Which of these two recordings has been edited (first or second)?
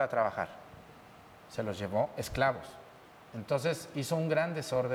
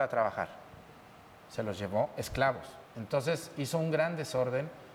second